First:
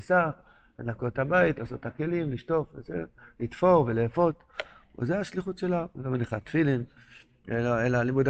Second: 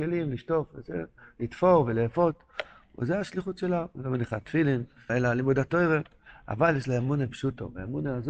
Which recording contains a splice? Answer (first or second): second